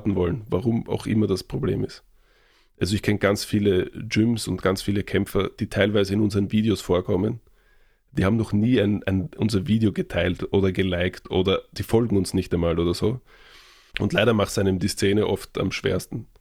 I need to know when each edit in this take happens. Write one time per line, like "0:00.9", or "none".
0:13.9